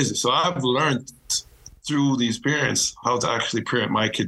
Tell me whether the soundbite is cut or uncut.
uncut